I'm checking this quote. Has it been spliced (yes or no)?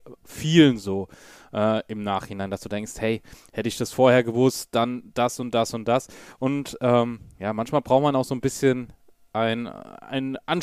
no